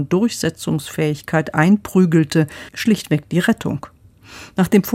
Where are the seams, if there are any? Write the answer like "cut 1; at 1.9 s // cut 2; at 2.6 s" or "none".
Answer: cut 1; at 2.7 s